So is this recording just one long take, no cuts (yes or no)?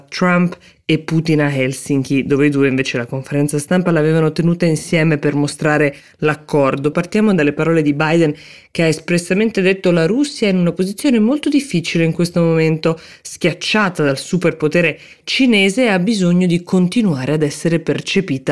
no